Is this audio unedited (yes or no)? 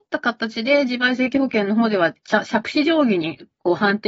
yes